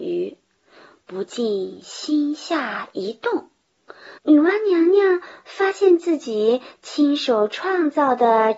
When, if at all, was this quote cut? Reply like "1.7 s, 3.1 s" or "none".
4.2 s